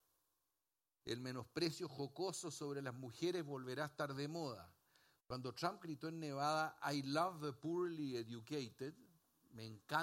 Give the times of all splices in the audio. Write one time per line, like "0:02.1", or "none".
0:01.0
0:05.2

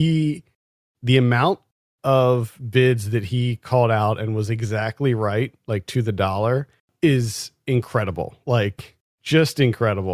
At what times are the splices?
none

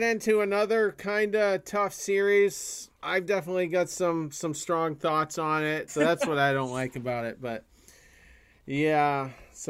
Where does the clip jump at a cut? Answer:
0:02.9
0:05.9

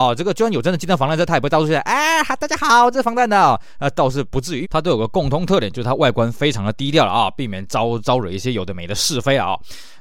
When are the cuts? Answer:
0:02.9
0:04.6

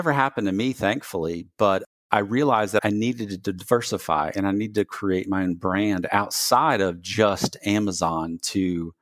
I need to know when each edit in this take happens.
0:02.8

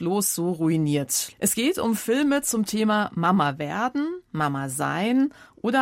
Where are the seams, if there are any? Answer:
0:01.3

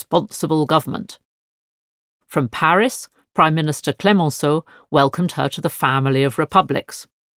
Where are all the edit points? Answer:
none

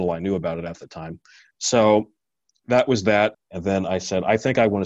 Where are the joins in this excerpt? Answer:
0:01.4
0:03.3

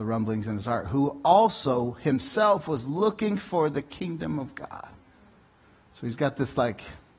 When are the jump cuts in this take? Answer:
none

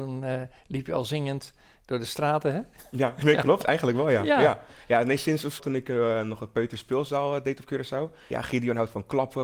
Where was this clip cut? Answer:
0:05.6
0:08.3

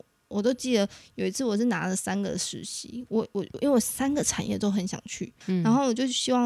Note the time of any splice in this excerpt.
0:05.4

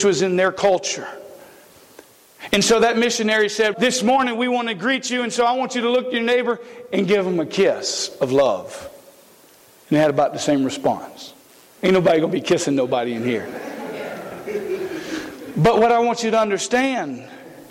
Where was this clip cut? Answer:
0:03.7

